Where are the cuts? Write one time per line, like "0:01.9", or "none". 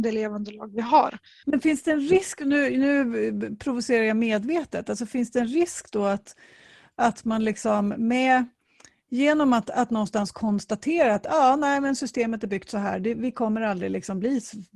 0:01.4